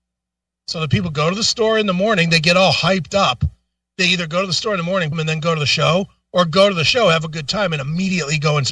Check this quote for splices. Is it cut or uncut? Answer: cut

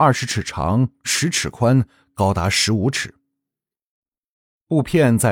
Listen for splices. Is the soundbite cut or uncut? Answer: uncut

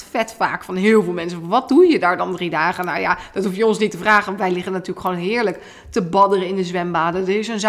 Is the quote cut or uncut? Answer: uncut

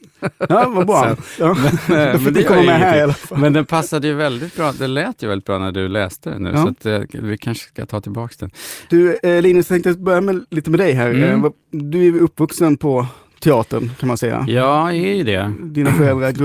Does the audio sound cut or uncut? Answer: uncut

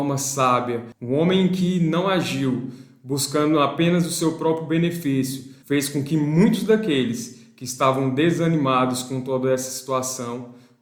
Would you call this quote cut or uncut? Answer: cut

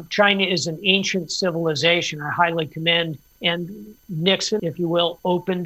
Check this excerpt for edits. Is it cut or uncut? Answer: cut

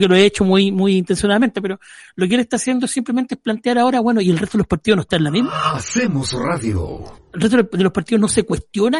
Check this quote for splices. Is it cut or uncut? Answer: uncut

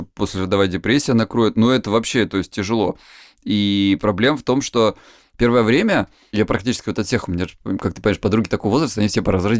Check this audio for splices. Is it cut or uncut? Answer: uncut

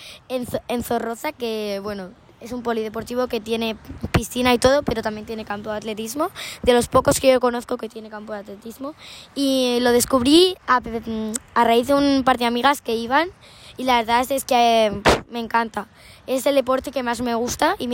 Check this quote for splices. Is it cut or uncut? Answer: uncut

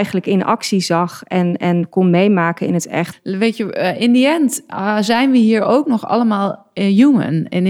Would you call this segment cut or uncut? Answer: cut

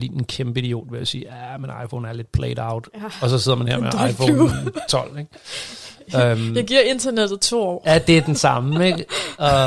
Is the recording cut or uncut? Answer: uncut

